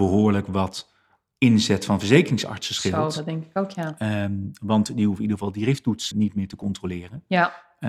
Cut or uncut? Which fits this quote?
cut